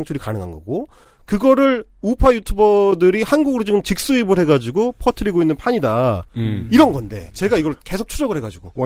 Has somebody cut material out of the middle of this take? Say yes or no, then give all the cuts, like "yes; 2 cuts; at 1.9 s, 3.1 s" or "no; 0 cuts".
no; 0 cuts